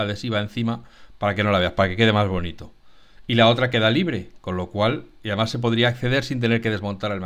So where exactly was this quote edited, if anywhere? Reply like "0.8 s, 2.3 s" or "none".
none